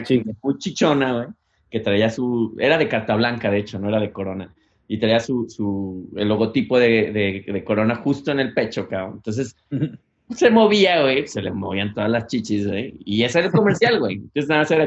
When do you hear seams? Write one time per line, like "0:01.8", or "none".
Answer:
none